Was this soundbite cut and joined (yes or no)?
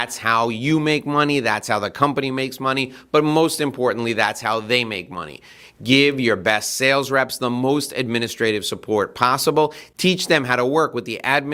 no